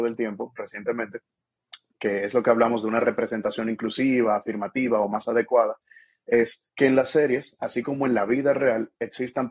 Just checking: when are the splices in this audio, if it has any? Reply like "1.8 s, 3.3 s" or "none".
6.7 s